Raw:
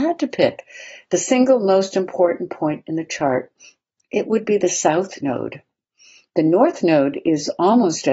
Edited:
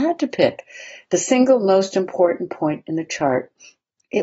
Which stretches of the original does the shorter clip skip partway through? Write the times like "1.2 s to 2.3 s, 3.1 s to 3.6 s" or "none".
none